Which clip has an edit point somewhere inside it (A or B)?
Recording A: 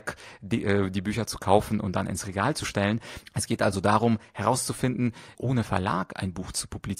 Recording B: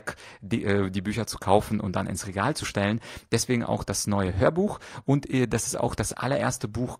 A